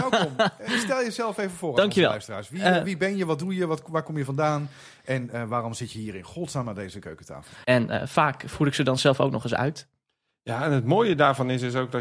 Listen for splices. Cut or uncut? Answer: cut